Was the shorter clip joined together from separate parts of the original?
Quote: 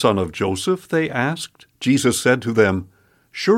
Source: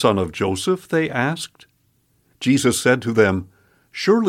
yes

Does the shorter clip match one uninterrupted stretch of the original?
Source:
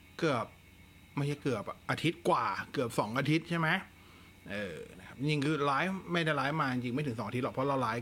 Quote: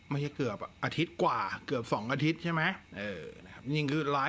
no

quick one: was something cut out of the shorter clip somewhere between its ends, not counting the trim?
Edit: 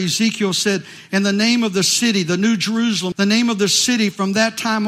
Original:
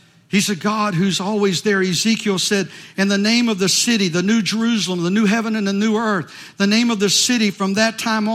yes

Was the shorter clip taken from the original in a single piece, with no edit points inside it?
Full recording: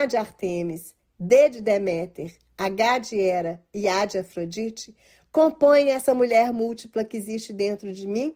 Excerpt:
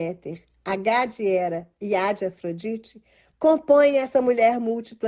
yes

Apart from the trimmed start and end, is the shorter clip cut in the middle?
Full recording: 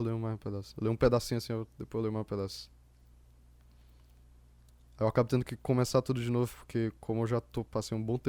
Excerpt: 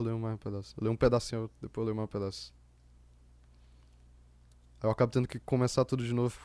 yes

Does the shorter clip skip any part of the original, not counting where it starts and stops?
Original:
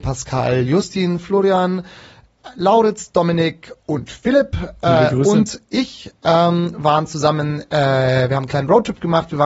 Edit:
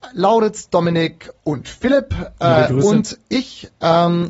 no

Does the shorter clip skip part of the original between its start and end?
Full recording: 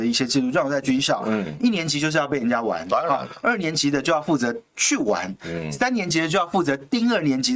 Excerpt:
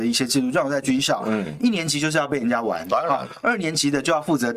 no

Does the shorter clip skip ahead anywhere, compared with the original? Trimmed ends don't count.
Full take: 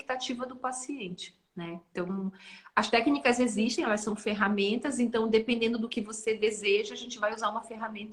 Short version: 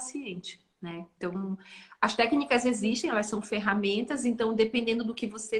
no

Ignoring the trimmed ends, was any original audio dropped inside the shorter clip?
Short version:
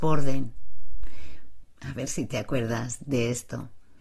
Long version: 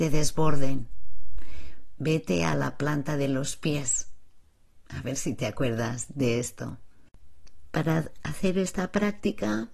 yes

